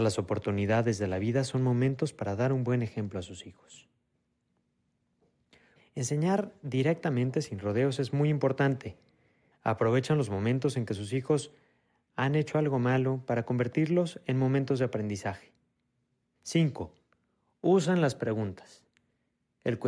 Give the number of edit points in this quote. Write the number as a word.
three